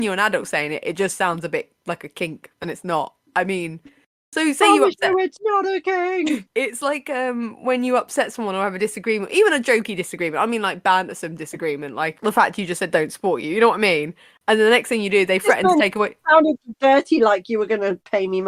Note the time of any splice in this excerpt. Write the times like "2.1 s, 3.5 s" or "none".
none